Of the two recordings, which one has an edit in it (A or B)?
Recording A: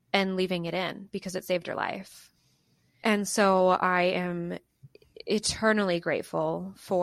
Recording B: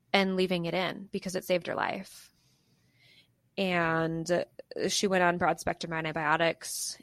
A